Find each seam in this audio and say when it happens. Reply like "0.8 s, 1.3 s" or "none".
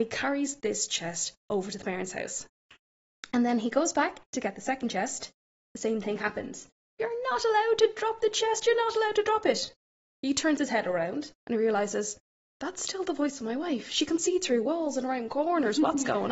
none